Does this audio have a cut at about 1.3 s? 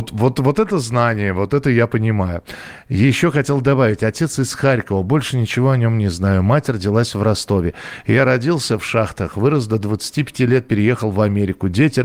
no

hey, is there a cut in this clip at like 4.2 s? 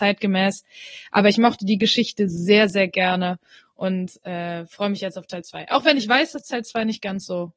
no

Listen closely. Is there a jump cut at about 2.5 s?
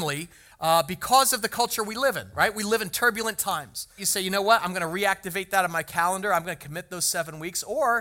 no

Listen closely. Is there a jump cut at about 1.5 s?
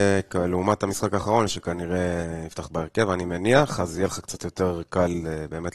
yes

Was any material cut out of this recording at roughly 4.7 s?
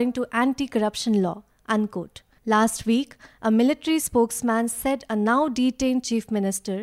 no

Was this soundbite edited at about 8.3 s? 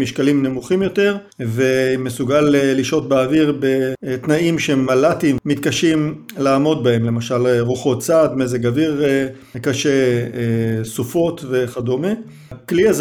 no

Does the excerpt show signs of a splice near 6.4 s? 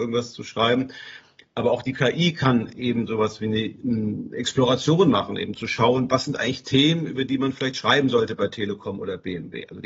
no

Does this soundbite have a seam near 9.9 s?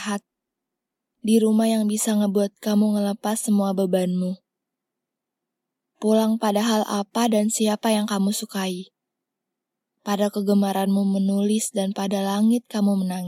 no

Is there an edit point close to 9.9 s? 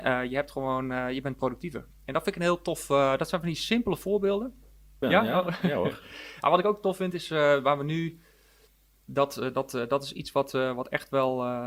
no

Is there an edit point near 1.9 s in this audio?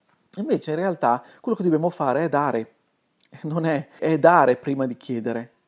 no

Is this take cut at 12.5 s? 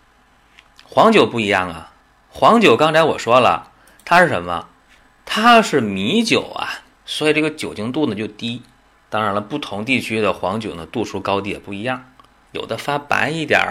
yes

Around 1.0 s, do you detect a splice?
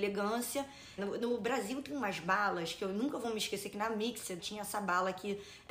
yes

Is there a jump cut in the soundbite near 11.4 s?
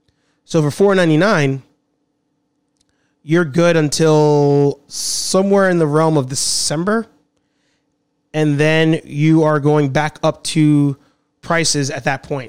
yes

